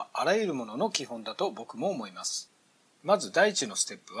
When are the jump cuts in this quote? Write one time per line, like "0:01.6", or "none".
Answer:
0:02.9